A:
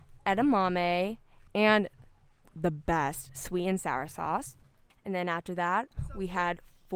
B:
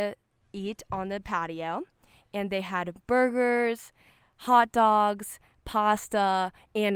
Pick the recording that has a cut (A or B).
A